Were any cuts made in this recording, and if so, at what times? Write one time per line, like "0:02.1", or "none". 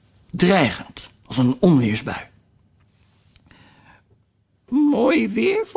none